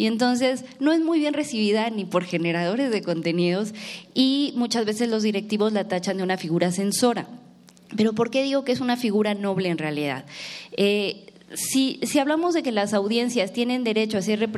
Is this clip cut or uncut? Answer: uncut